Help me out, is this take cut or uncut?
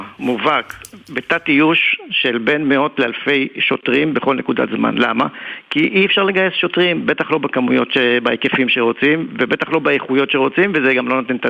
uncut